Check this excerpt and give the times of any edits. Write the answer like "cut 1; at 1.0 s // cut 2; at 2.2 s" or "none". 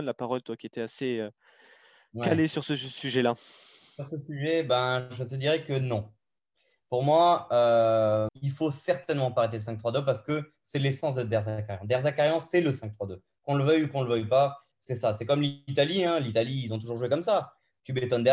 cut 1; at 8.3 s